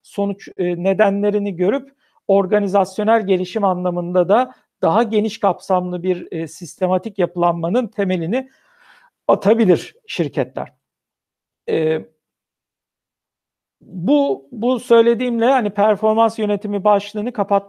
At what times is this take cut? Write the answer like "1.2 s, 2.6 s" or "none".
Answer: none